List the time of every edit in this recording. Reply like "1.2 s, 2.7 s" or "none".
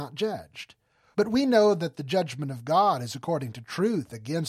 1.1 s